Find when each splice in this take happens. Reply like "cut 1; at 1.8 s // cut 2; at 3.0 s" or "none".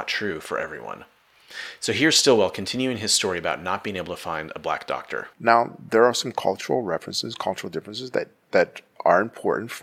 cut 1; at 5.3 s